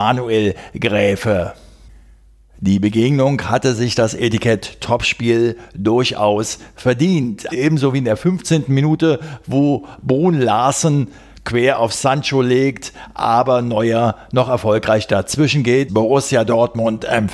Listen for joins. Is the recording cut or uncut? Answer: cut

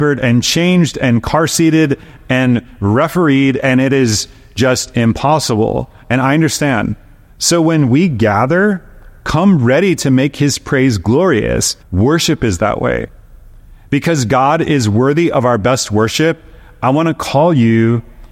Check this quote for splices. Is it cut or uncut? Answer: cut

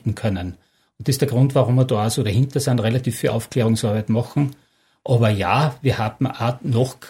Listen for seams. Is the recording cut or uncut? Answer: uncut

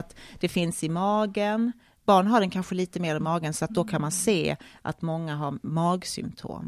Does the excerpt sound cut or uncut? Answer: uncut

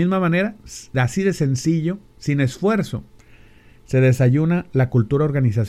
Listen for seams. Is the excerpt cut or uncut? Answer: uncut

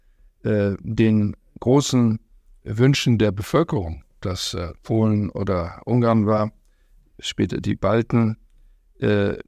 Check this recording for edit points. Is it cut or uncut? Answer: cut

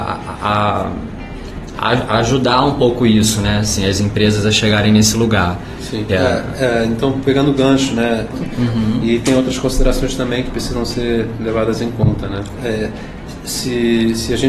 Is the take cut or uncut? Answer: cut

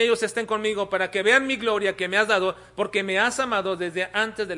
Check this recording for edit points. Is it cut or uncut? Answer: uncut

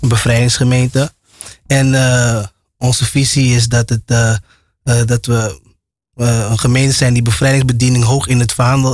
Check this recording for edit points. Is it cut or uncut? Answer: uncut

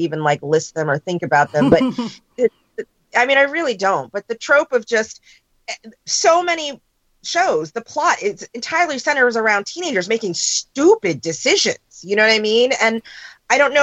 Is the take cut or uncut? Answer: uncut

